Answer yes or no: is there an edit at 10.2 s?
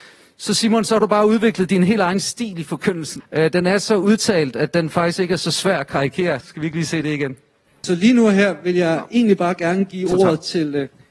no